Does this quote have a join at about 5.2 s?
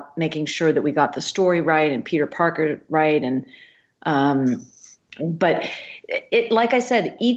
yes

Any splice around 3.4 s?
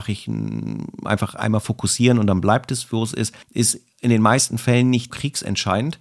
yes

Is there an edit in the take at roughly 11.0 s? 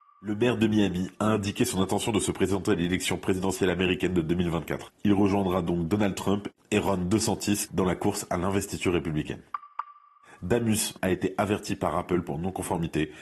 yes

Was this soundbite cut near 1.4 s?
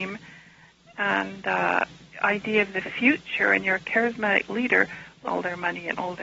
no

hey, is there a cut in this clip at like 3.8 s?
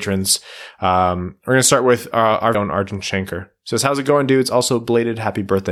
no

